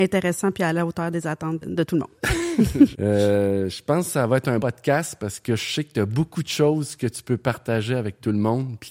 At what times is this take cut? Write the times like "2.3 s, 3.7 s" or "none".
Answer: 1.6 s, 2.9 s, 4.6 s